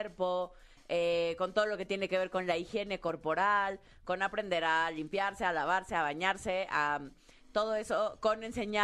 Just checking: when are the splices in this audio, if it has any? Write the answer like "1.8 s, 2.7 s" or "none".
none